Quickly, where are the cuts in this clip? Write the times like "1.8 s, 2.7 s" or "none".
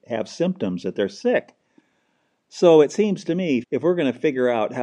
3.6 s